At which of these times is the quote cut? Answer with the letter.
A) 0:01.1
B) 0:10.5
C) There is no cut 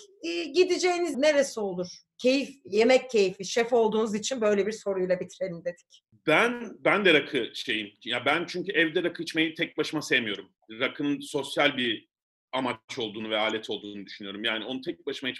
A